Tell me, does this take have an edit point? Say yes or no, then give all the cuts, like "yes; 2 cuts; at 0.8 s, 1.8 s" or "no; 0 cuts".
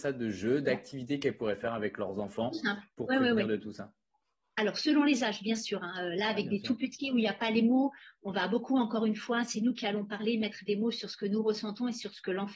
no; 0 cuts